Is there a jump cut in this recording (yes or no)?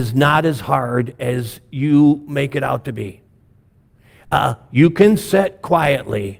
no